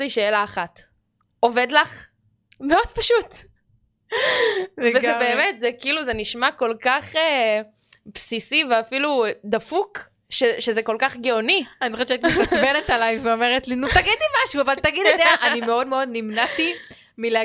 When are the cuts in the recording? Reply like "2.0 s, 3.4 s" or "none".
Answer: 2.5 s